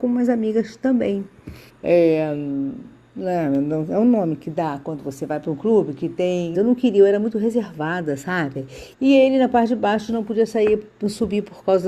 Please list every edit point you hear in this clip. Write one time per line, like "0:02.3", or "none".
0:01.7
0:06.5
0:08.9